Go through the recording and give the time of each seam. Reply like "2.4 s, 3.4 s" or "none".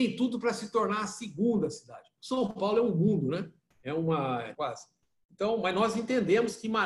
2.2 s, 4.5 s